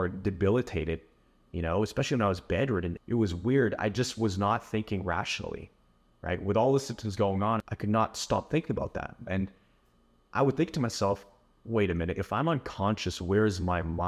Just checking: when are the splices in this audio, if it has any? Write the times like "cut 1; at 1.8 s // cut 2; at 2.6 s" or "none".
cut 1; at 9.3 s